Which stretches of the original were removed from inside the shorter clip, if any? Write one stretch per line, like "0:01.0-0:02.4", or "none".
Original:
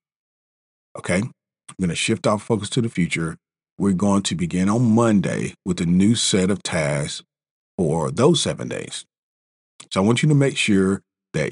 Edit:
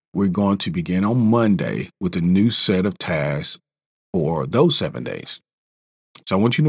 none

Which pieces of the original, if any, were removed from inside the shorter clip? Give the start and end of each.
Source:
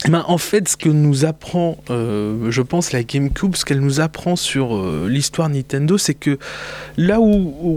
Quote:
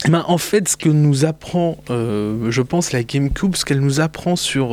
none

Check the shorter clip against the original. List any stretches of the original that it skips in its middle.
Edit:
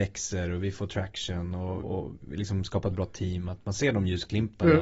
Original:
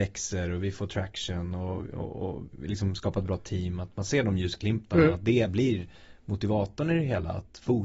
0:01.8-0:02.1

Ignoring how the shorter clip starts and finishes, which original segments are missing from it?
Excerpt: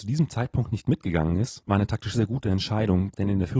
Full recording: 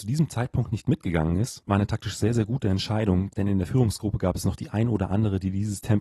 0:02.2-0:02.3

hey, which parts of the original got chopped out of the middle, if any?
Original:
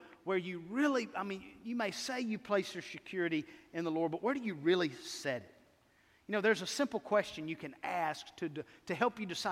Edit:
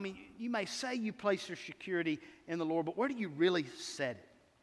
none

